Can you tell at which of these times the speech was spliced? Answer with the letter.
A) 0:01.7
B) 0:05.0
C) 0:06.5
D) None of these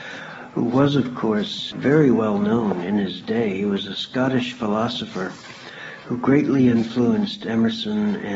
A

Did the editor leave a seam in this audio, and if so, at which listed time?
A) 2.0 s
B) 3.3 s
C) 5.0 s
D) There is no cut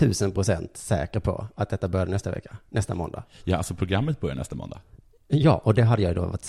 D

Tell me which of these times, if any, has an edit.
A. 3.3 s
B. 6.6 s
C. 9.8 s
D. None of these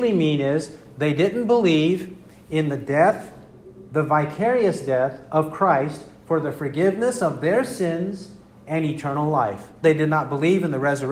C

